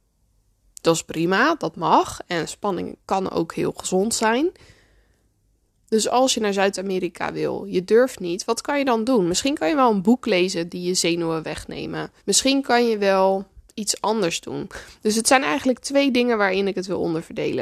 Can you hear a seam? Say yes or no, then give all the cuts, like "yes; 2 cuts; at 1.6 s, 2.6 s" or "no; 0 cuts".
yes; 2 cuts; at 5.7 s, 12.2 s